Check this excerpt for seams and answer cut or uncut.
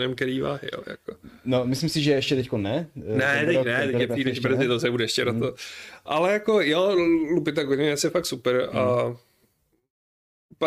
uncut